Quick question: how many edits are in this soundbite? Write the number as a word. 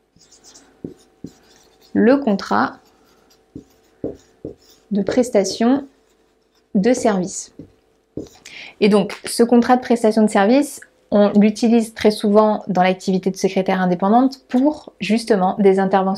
zero